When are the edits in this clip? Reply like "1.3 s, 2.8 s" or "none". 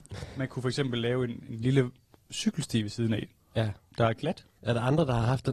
4.6 s